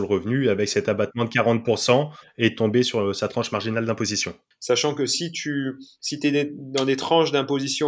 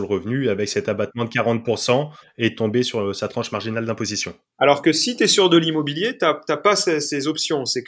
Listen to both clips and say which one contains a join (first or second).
first